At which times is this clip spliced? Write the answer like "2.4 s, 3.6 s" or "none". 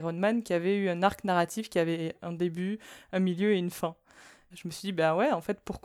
4.5 s